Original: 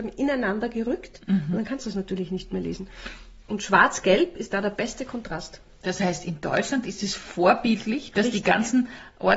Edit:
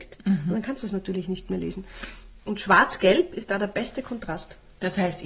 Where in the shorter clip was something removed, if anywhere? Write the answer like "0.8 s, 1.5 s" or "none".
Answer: none